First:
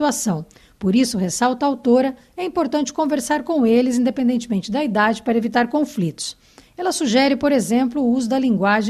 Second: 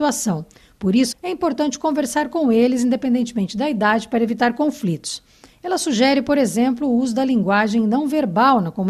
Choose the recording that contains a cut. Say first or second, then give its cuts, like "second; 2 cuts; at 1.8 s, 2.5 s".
second; 1 cut; at 1.1 s